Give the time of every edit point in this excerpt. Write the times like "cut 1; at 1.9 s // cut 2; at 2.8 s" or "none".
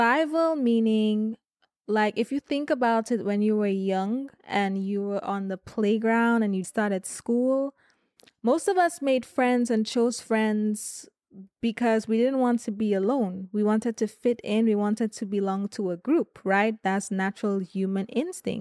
cut 1; at 6.6 s